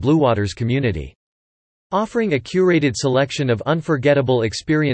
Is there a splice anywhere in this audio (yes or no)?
no